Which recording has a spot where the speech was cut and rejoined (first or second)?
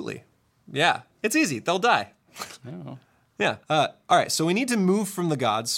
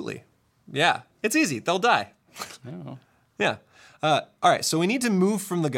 first